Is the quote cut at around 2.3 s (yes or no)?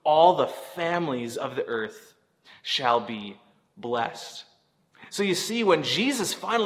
no